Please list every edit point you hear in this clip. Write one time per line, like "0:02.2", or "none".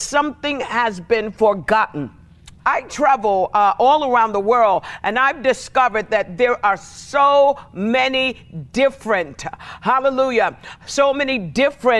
0:02.6